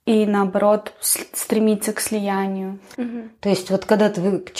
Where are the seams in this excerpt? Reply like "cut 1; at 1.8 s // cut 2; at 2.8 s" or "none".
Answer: cut 1; at 2.9 s